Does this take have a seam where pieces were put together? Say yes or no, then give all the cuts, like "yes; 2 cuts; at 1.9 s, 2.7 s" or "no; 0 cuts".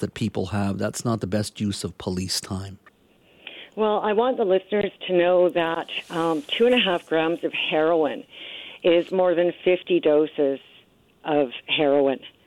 no; 0 cuts